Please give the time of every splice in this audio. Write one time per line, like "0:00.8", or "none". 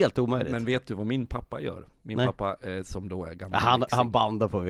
none